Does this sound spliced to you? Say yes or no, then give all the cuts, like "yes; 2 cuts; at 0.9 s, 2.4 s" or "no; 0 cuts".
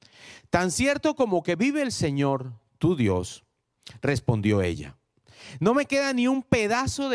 no; 0 cuts